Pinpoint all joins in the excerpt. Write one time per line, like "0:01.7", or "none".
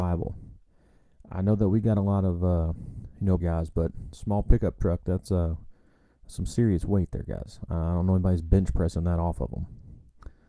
0:03.4